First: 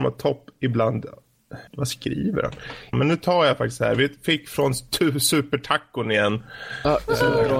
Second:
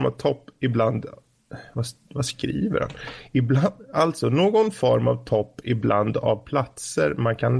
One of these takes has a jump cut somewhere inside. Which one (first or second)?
first